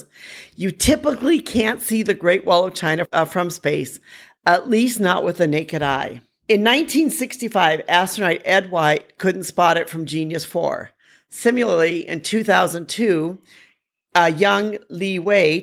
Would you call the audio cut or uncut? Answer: uncut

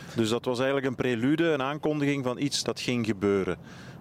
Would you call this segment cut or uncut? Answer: cut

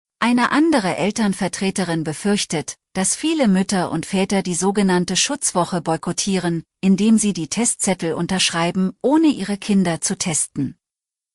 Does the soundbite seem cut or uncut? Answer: uncut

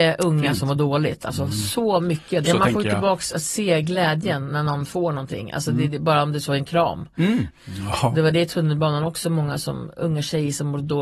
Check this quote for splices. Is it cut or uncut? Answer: cut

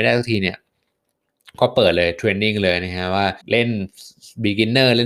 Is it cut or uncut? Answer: cut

